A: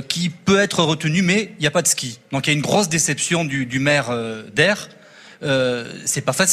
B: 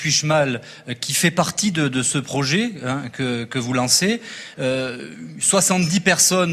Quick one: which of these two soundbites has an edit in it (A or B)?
B